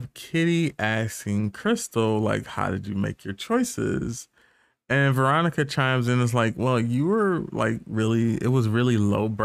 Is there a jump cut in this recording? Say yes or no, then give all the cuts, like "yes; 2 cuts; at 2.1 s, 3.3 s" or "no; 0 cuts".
no; 0 cuts